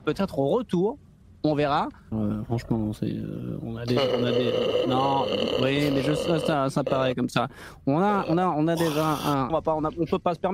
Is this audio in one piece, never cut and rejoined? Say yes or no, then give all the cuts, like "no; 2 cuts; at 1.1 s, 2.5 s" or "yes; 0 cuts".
no; 2 cuts; at 2.1 s, 9.5 s